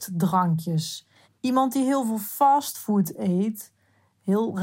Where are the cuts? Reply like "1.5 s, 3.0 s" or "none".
1.2 s